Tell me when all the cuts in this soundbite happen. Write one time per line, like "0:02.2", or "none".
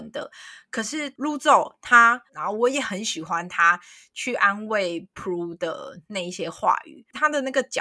0:02.3